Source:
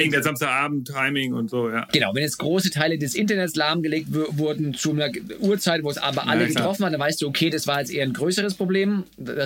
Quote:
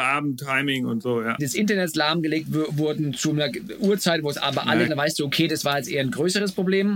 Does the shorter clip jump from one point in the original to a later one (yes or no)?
yes